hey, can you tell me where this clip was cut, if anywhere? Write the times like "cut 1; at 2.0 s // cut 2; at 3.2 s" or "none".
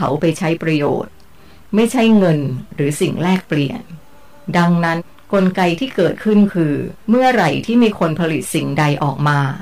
cut 1; at 5.0 s // cut 2; at 7.0 s